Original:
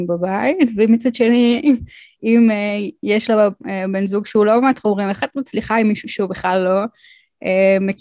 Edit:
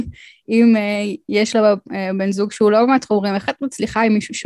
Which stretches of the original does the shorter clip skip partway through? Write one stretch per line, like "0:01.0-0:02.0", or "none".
none